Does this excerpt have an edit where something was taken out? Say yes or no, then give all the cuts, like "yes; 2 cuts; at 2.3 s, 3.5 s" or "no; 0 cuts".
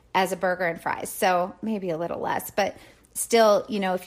no; 0 cuts